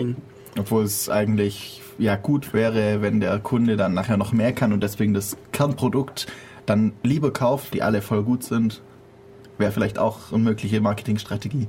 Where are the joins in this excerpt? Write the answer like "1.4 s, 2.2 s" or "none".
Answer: 7.7 s